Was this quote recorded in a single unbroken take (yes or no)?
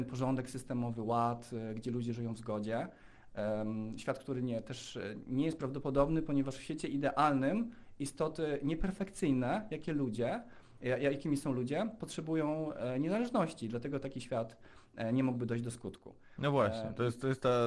yes